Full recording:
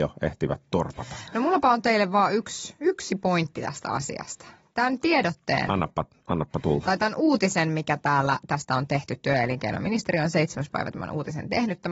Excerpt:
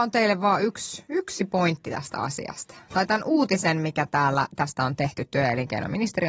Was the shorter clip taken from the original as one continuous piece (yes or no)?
no